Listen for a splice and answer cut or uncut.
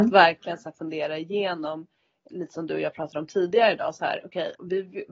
uncut